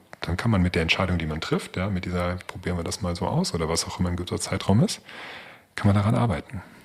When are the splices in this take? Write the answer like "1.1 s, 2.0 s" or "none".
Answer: 2.4 s